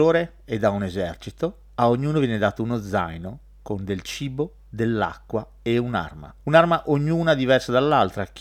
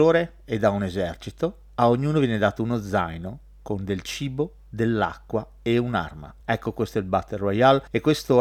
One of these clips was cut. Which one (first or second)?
second